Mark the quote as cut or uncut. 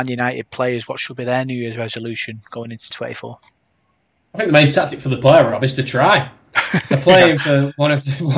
cut